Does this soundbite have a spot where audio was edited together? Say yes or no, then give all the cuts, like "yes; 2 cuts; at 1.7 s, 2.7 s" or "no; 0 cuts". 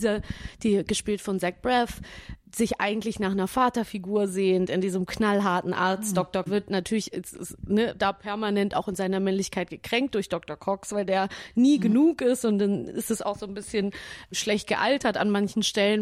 yes; 1 cut; at 6.5 s